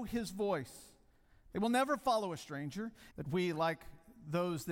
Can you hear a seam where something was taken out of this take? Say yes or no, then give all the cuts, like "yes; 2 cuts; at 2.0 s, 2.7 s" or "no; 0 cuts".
yes; 1 cut; at 3.1 s